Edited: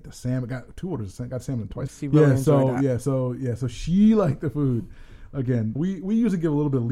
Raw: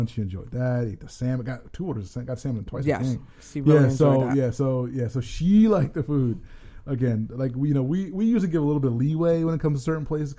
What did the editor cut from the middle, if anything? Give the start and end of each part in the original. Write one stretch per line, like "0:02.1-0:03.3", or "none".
0:02.8-0:03.4
0:07.3-0:07.9